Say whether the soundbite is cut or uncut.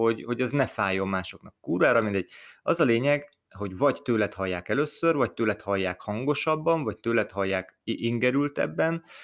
uncut